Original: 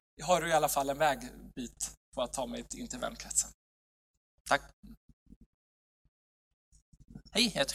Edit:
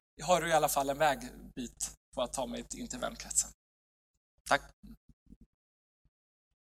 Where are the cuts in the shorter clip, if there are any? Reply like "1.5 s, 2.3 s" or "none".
none